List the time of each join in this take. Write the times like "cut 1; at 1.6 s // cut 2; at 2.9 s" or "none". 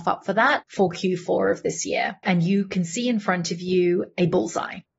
cut 1; at 2.2 s